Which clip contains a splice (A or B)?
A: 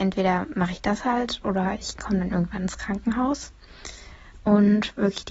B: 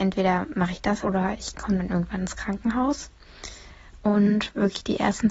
B